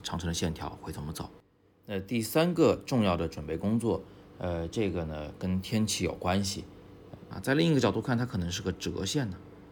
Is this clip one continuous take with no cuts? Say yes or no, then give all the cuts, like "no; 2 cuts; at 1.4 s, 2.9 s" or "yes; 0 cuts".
no; 2 cuts; at 4.3 s, 7.3 s